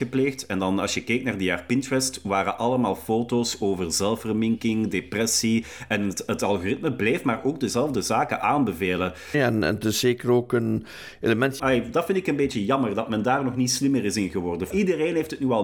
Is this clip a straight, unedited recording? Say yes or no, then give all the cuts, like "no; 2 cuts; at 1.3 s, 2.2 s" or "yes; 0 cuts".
no; 3 cuts; at 9.3 s, 11.6 s, 14.7 s